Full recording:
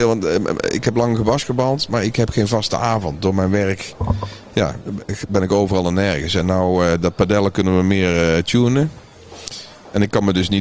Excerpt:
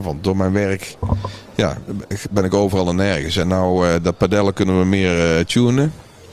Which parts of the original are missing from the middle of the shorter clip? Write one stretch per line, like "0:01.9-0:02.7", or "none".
none

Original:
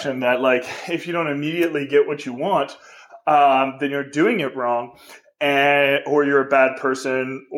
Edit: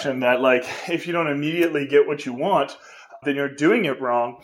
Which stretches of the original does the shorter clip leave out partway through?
0:03.2-0:03.8

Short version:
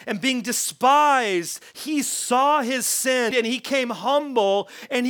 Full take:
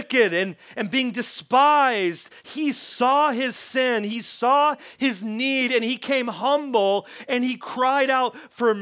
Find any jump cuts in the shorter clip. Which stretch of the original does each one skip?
0:04.0-0:05.7

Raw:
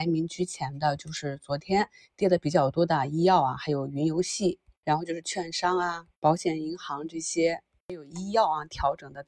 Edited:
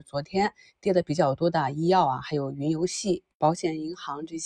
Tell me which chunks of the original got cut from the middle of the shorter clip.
0:04.7-0:06.1

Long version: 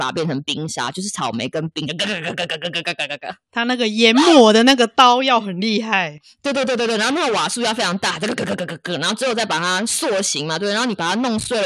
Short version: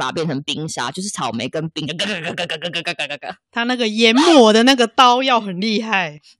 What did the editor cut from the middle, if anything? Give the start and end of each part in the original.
none

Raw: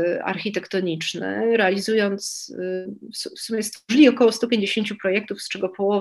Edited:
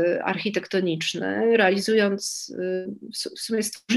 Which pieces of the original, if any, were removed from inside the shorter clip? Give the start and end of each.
none

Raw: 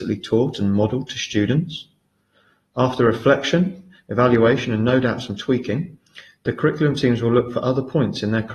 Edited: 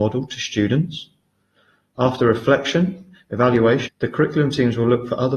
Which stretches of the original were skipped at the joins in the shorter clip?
0:04.7-0:06.3

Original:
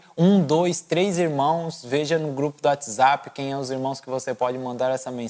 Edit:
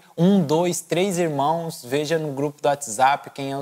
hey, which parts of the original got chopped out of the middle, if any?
none

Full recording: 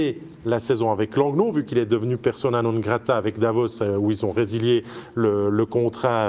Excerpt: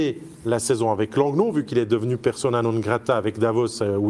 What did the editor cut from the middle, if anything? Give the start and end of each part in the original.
none

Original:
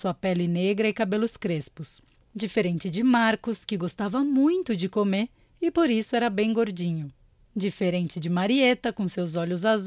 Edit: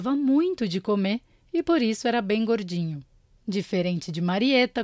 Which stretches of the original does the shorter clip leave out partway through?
none

